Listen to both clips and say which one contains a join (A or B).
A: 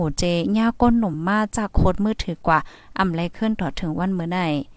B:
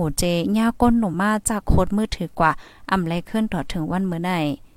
B